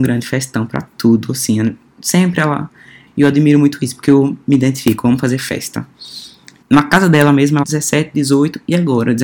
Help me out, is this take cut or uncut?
cut